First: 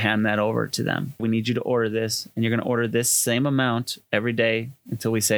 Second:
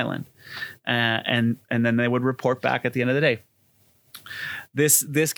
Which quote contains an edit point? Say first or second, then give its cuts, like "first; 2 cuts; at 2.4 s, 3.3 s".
first; 1 cut; at 1.2 s